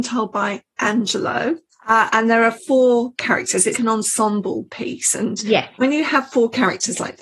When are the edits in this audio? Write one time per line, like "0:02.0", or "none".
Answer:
0:01.7
0:03.7